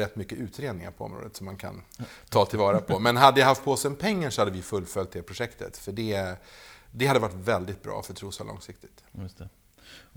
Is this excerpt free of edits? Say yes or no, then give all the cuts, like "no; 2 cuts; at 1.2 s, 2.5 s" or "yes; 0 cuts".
yes; 0 cuts